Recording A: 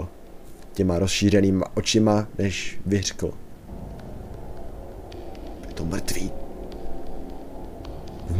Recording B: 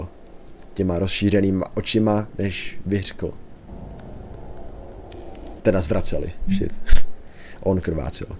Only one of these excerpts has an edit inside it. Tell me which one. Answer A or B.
B